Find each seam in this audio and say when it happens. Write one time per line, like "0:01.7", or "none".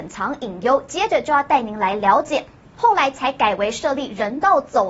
0:02.7